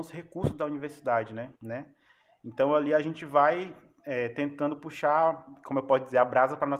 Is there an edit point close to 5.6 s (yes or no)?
no